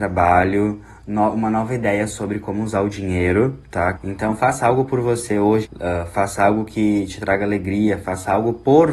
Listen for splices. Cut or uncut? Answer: cut